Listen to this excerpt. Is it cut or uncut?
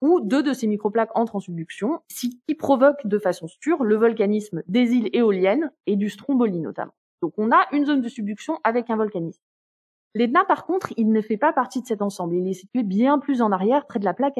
uncut